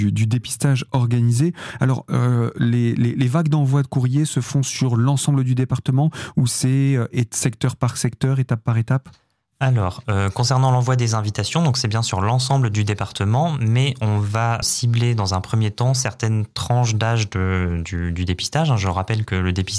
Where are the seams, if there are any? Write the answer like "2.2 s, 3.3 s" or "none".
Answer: 14.6 s